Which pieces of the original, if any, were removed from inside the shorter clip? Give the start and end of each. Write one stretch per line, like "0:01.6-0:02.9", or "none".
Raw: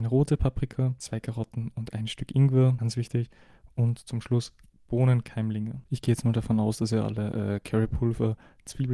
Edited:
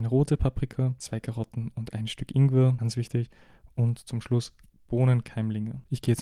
none